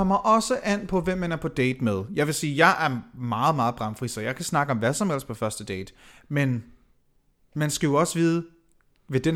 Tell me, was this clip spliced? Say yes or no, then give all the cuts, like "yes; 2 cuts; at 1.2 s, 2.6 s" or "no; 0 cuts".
no; 0 cuts